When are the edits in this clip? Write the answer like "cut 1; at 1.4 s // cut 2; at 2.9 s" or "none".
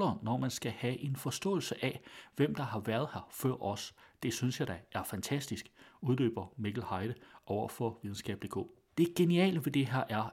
cut 1; at 8.9 s